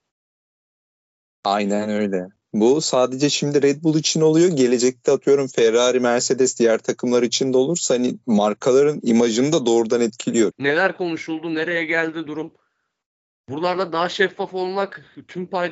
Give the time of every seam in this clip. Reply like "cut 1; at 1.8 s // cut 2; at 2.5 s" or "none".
cut 1; at 10.5 s